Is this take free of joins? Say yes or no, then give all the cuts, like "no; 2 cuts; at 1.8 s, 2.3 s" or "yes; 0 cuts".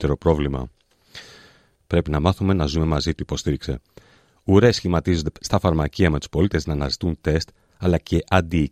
no; 1 cut; at 1.8 s